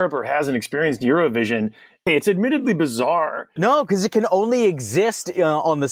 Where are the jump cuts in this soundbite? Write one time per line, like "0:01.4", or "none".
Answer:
0:02.1
0:03.6